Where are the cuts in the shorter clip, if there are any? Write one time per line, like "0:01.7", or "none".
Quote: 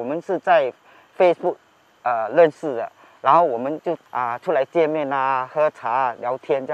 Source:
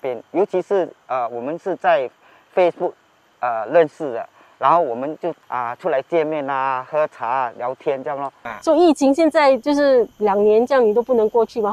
none